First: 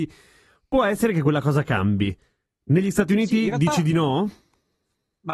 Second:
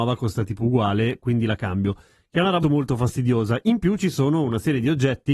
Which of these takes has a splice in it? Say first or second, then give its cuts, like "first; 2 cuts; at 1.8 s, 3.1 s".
second; 1 cut; at 2.6 s